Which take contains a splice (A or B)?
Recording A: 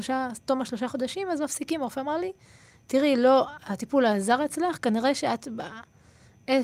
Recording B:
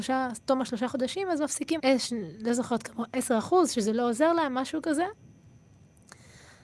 B